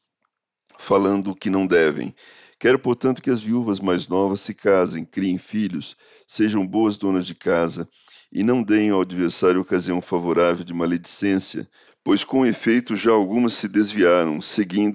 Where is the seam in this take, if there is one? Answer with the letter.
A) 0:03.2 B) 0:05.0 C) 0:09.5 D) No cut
D